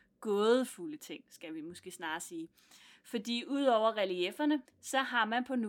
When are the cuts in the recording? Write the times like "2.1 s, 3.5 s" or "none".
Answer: 4.7 s